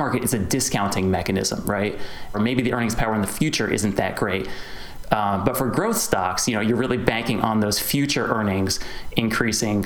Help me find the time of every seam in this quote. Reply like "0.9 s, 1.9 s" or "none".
2.3 s